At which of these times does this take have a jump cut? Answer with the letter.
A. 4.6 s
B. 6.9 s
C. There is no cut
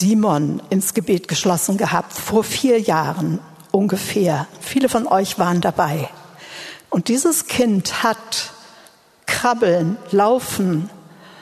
B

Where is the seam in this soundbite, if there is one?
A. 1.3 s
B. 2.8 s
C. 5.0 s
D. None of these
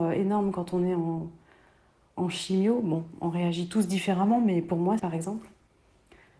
C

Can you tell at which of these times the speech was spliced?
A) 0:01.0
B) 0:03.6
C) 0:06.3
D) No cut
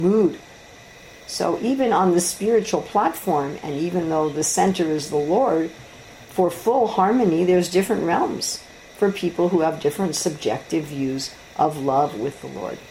A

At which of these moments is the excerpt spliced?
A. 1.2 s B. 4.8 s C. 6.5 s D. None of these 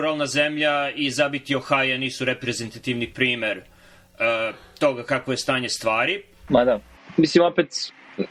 C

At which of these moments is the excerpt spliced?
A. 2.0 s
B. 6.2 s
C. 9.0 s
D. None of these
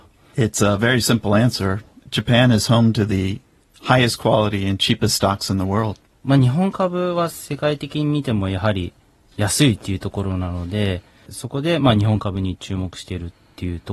B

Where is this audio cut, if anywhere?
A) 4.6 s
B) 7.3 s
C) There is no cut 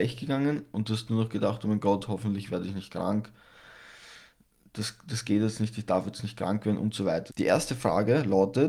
B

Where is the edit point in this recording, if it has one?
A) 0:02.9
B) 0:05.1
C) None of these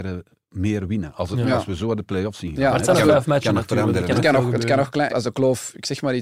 B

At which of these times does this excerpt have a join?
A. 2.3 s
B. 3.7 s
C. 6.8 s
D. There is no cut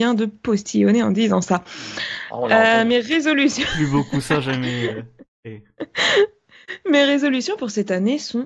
D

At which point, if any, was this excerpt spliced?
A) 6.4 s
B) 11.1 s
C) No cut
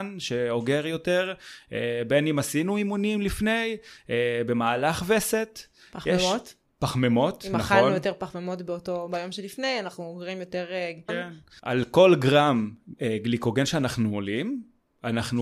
B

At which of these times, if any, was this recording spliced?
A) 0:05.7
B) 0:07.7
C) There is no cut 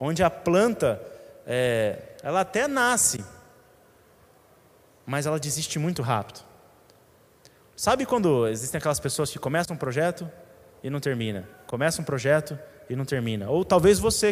C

